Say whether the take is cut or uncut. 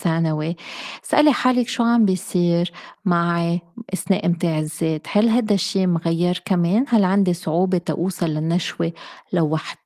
uncut